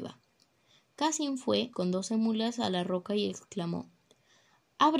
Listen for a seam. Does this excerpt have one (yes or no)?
yes